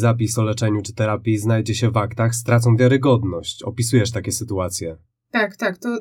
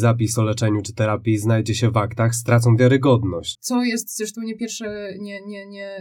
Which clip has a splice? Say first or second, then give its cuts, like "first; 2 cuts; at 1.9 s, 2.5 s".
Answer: second; 1 cut; at 3.5 s